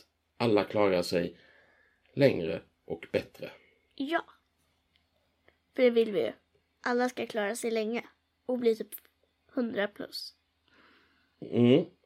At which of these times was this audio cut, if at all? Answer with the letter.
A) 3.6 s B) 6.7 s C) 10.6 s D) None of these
D